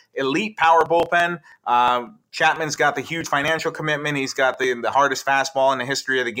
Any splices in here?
no; 0 cuts

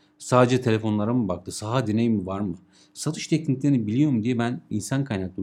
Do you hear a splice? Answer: no; 0 cuts

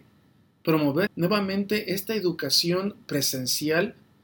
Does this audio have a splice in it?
yes; 1 cut; at 1.1 s

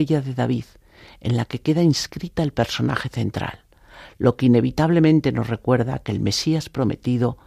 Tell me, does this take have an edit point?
no; 0 cuts

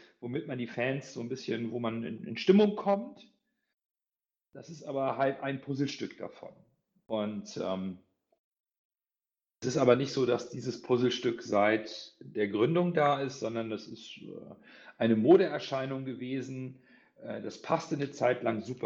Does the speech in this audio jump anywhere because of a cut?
no; 0 cuts

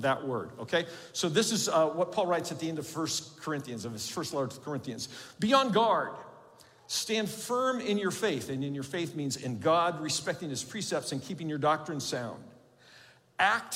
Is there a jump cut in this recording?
no; 0 cuts

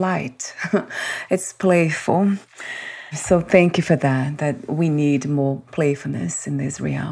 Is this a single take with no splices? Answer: yes; 0 cuts

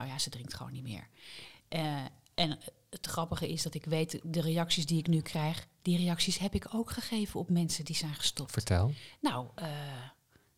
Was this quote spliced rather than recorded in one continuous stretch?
no; 0 cuts

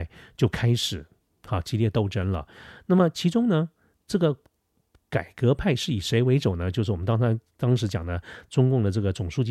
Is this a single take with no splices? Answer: yes; 0 cuts

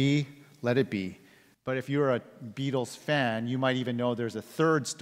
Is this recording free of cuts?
no; 1 cut; at 1.5 s

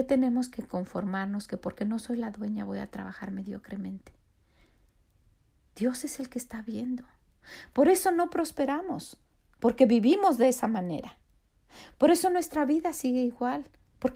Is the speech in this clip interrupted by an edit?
no; 0 cuts

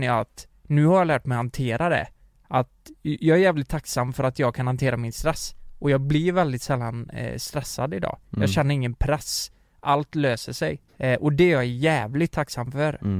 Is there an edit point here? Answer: yes; 1 cut; at 10.9 s

